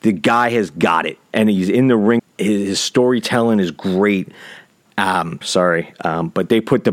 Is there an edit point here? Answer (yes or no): yes